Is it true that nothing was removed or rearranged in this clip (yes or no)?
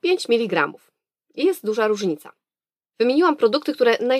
no